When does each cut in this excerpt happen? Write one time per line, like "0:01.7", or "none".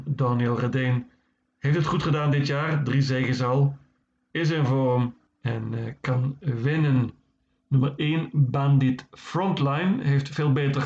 none